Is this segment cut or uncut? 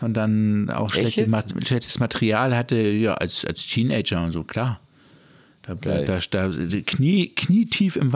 uncut